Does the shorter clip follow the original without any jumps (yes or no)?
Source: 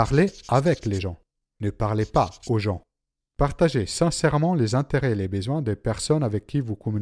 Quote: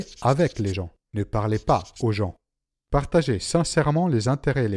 no